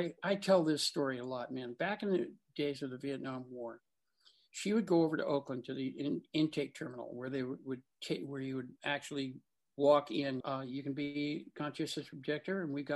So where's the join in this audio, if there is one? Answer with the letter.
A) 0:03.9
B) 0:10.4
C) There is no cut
B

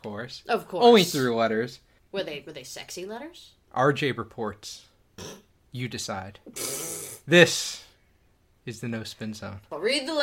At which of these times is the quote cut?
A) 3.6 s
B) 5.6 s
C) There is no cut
A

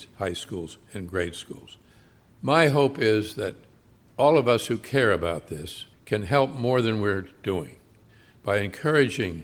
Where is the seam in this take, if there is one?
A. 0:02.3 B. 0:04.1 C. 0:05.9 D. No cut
C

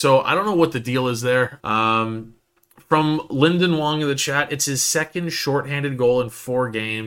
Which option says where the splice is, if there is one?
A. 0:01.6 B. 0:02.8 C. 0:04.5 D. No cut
A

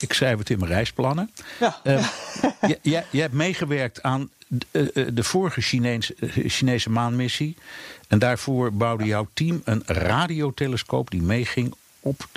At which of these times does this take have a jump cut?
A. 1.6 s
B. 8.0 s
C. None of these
C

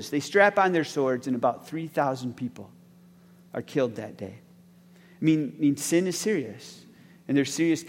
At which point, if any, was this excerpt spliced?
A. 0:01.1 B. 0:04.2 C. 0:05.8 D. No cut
D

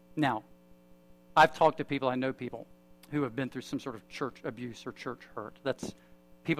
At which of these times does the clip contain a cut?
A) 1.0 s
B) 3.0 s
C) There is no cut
C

